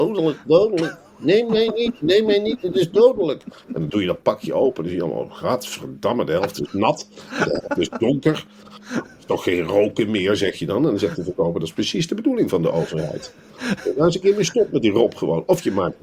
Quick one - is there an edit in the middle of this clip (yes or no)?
no